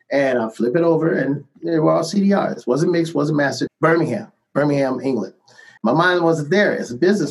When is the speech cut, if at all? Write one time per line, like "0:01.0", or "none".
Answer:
0:03.7
0:05.8